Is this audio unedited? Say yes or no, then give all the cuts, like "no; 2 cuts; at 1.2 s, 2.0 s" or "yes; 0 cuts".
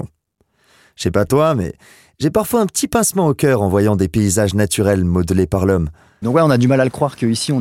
no; 1 cut; at 6.2 s